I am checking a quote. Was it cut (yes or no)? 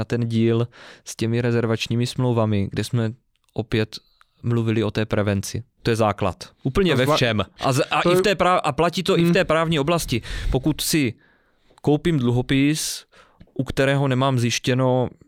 yes